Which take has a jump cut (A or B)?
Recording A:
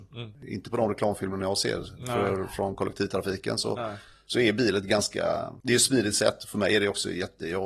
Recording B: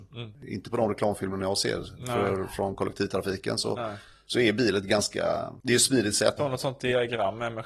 B